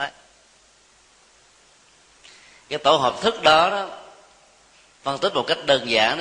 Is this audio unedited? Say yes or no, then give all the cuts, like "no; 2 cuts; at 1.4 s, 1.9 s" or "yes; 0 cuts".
yes; 0 cuts